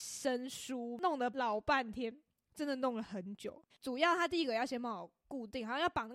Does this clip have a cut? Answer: yes; 1 cut; at 3.7 s

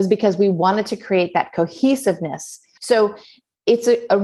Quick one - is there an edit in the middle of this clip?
yes; 1 cut; at 2.8 s

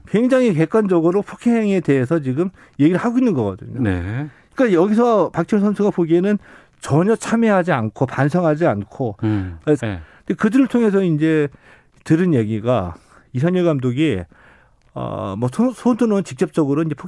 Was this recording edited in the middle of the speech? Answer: yes; 1 cut; at 9.8 s

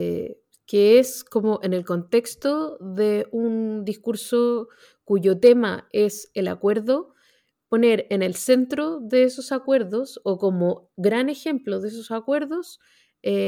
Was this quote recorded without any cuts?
yes; 0 cuts

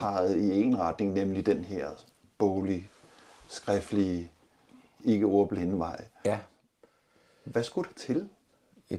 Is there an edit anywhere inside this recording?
no; 0 cuts

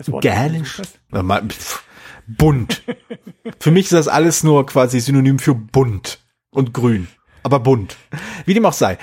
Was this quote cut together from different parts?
yes; 1 cut; at 1.1 s

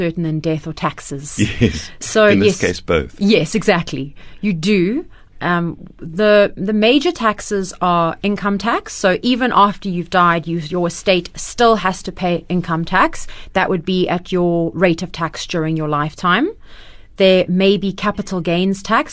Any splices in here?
no; 0 cuts

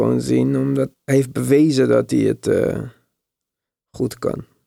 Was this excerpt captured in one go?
no; 1 cut; at 0.9 s

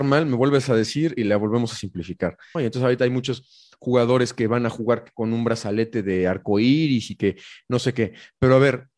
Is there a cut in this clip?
yes; 1 cut; at 2.5 s

